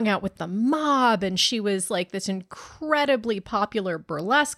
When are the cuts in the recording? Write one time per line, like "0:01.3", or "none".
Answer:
none